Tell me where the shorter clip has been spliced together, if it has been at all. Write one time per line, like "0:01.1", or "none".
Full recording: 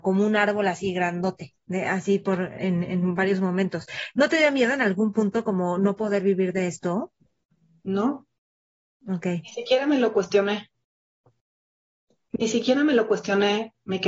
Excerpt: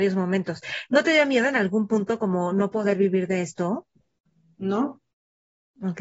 none